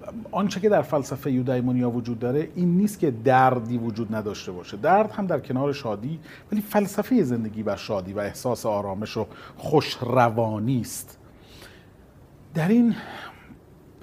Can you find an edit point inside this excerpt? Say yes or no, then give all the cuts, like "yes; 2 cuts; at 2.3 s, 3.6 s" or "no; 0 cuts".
no; 0 cuts